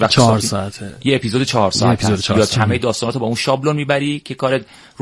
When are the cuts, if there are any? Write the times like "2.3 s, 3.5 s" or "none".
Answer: 2.5 s